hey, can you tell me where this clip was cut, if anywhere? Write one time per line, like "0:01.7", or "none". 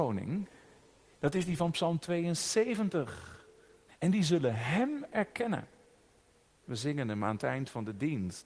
0:01.2
0:03.9
0:06.6